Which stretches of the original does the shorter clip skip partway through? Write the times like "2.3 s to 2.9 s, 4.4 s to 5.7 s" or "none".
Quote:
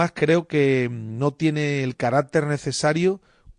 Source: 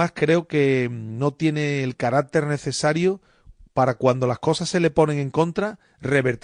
none